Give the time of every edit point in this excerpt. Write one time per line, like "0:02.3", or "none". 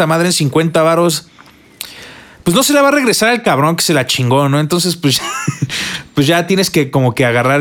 none